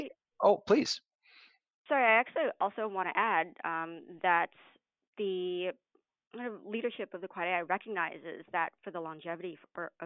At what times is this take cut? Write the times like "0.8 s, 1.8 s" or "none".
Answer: none